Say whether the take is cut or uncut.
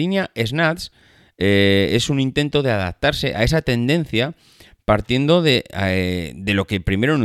uncut